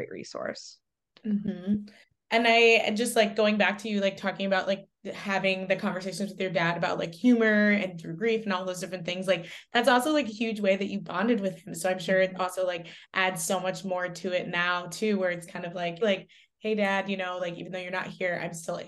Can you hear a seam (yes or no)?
yes